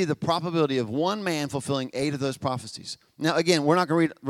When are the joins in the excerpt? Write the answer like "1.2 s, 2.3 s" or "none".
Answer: none